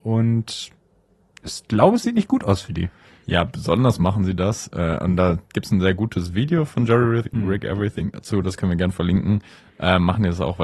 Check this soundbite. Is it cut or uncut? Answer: uncut